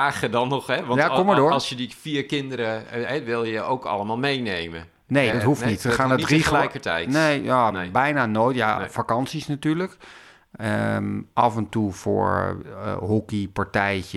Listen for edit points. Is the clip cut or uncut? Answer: uncut